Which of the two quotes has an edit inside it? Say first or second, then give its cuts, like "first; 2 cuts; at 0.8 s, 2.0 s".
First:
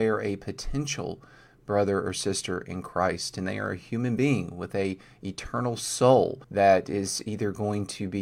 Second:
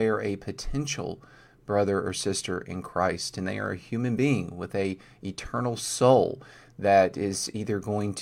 first; 1 cut; at 6.4 s